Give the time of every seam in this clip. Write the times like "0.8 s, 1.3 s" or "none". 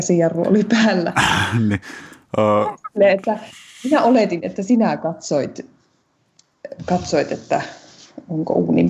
none